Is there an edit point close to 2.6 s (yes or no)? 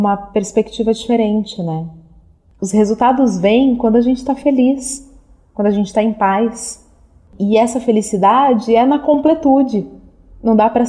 yes